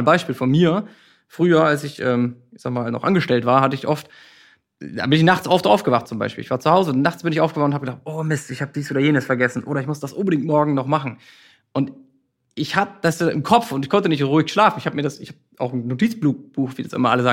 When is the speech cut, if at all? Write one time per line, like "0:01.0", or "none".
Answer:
none